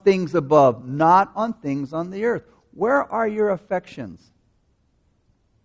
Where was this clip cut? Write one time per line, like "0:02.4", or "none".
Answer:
none

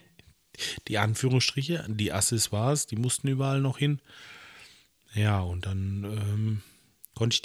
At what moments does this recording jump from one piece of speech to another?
none

